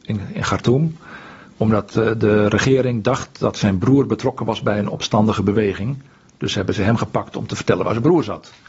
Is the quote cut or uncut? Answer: uncut